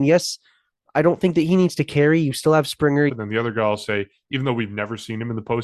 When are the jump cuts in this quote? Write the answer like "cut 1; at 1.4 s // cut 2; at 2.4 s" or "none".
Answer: cut 1; at 3.1 s